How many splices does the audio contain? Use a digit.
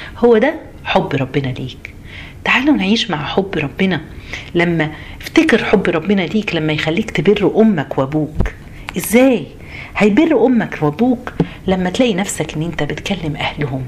0